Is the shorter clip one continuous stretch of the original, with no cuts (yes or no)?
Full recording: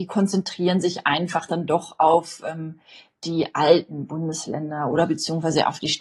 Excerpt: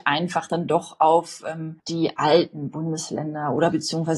no